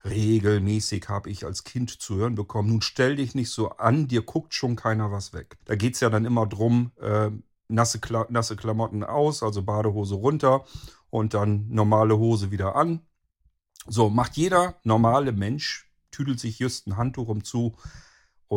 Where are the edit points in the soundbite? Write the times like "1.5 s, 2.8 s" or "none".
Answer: 5.6 s